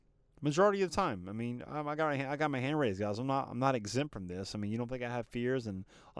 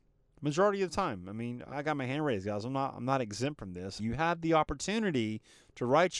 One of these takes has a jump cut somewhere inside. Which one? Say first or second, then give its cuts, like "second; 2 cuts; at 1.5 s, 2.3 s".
second; 2 cuts; at 1.7 s, 4.0 s